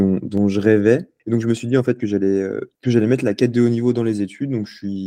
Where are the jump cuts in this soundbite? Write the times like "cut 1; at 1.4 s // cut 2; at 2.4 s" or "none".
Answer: none